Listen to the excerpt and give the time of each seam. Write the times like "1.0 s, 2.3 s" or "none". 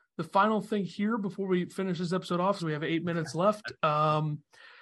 2.6 s